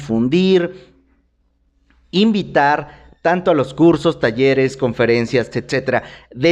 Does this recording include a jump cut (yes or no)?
yes